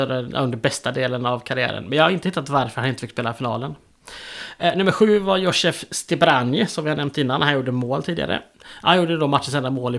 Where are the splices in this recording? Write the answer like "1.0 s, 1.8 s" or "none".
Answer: 8.5 s